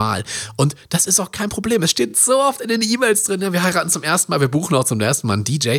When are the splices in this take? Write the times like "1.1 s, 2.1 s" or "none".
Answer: none

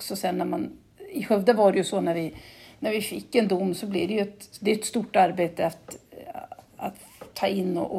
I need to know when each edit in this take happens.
none

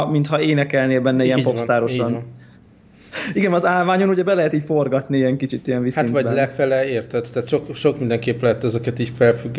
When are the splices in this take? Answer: none

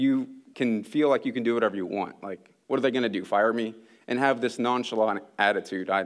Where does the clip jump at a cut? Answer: none

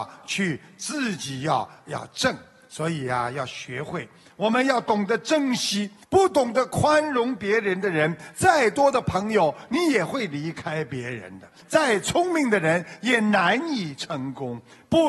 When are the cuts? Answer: 6.0 s, 11.6 s

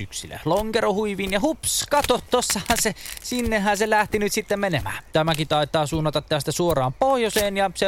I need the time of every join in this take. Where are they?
5.1 s

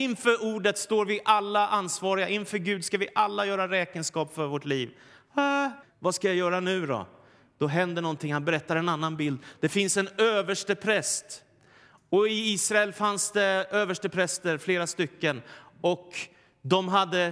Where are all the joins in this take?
5.8 s

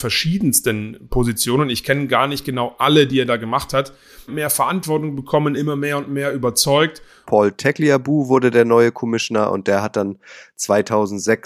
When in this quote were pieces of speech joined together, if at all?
4.3 s, 7.3 s

